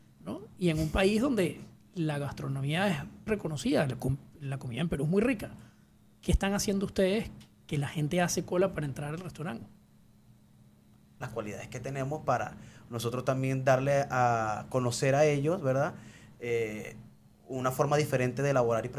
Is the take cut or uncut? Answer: cut